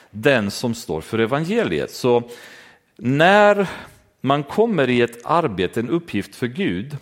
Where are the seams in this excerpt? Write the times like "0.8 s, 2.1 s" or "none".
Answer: none